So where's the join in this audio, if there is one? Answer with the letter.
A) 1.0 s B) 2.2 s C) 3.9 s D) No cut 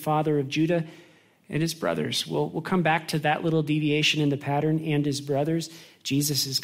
D